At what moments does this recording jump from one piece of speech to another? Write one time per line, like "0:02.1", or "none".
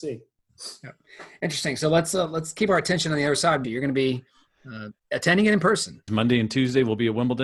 0:03.6
0:05.0
0:06.1